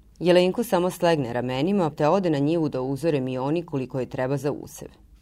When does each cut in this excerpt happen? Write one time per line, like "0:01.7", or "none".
0:01.9